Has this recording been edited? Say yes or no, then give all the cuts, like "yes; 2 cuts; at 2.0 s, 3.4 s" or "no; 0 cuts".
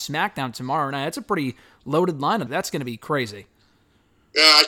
yes; 1 cut; at 2.5 s